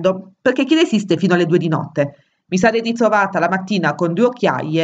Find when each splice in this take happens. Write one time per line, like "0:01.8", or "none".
none